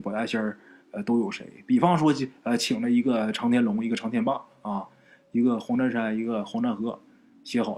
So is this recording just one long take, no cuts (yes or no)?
yes